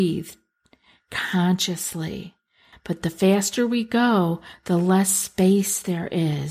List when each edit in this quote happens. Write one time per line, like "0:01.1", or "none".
0:02.7

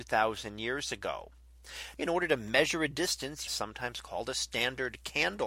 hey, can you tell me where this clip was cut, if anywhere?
0:02.0
0:03.5

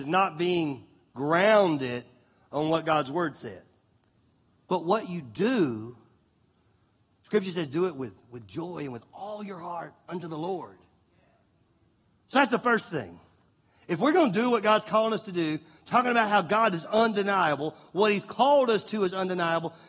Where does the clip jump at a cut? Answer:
none

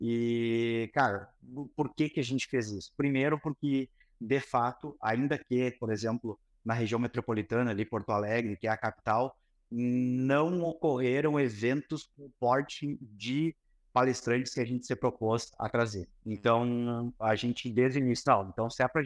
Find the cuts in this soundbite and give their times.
0:16.2

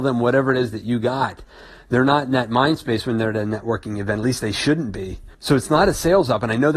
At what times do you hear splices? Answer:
0:05.3

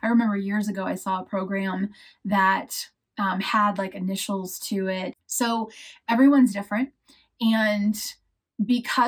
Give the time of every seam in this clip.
0:05.1

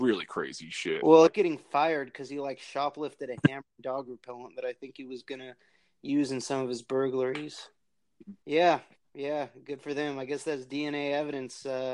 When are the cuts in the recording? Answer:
0:01.3
0:08.4

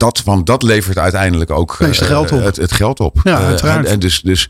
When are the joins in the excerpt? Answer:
0:01.8

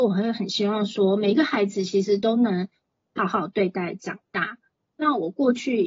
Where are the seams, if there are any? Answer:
0:03.2

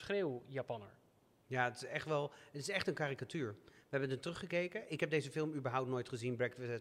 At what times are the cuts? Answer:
none

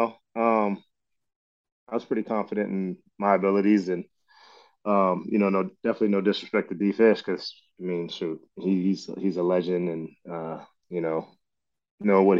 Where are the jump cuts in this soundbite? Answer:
none

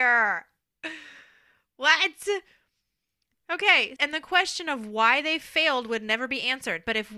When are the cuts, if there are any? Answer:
0:04.0

